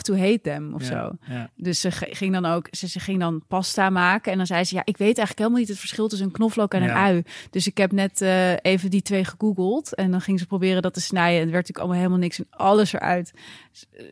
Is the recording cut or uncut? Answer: uncut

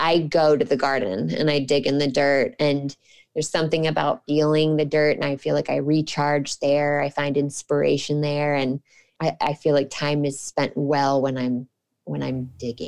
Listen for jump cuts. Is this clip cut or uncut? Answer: uncut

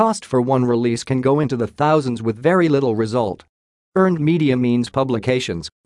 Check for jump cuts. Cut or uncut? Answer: uncut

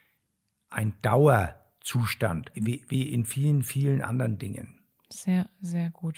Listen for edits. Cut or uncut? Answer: cut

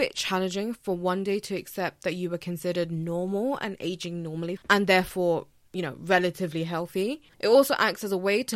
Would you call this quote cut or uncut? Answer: cut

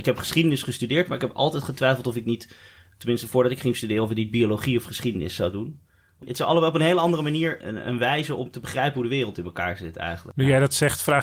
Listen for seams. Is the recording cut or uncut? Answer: uncut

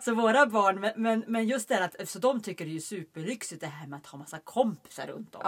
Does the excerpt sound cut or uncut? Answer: uncut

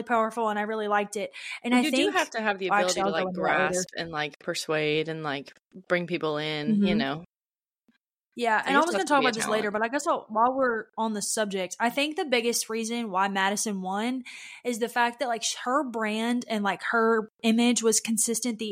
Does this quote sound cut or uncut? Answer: uncut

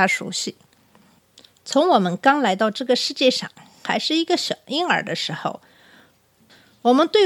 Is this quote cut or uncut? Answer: uncut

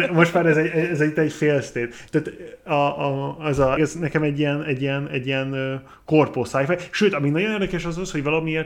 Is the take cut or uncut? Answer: cut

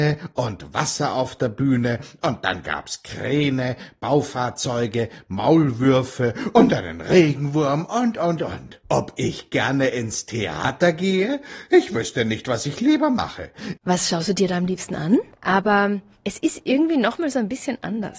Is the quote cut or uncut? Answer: cut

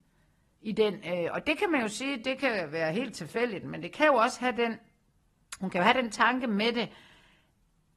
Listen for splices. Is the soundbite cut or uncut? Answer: uncut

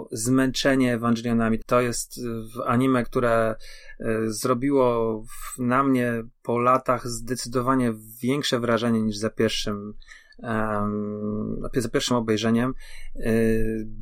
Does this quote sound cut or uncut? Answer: cut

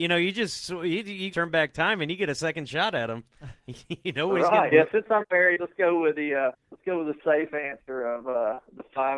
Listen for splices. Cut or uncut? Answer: cut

